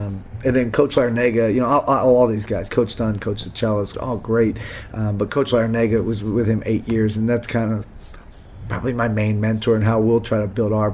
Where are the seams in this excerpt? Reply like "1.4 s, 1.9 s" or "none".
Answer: 3.9 s